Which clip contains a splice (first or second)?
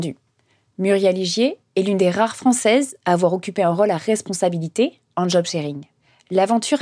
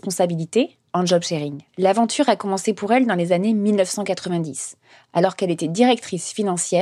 second